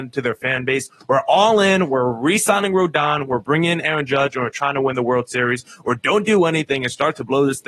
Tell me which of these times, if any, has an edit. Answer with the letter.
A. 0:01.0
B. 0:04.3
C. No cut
C